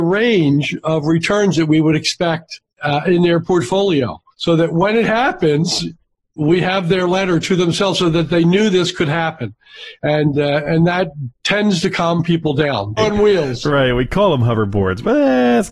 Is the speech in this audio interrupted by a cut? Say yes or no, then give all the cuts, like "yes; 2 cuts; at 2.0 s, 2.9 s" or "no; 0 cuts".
yes; 2 cuts; at 4.3 s, 13.0 s